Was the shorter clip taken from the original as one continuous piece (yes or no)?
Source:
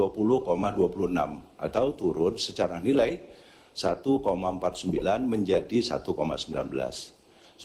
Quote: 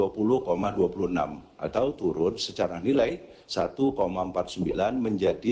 no